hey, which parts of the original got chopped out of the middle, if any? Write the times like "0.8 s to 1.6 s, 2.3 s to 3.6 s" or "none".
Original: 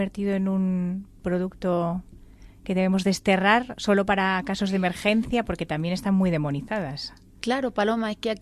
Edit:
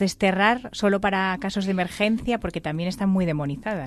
none